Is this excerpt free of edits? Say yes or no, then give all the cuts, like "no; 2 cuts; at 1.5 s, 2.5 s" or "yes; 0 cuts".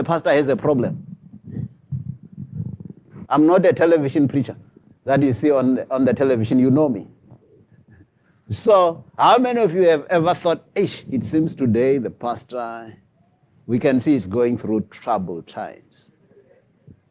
no; 1 cut; at 3.2 s